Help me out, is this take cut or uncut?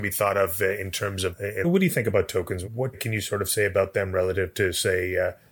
cut